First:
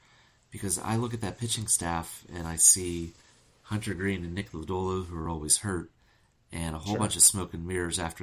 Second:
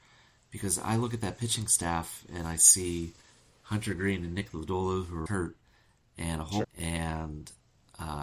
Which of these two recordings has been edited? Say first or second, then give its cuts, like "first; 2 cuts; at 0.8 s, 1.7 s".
second; 2 cuts; at 5.3 s, 6.6 s